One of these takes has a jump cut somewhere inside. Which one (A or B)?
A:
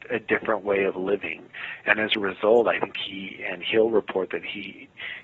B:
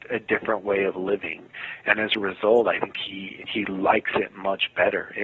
B